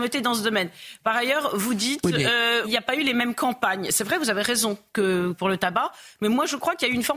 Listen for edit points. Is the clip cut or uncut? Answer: cut